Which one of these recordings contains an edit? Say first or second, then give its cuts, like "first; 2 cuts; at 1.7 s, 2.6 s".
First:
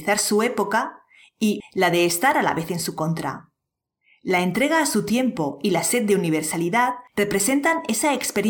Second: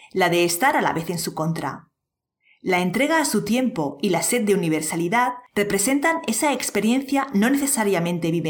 first; 1 cut; at 1.6 s